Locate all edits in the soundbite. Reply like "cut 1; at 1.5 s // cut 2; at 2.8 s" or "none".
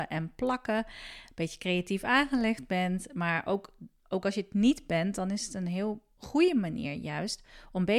none